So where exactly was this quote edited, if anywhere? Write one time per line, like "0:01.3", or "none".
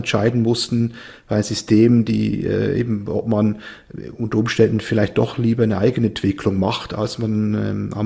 none